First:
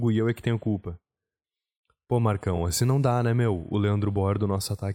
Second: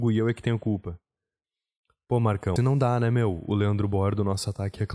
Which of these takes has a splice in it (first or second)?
second